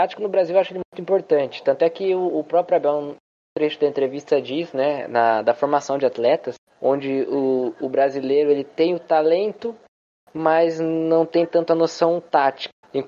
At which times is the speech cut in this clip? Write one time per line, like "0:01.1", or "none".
none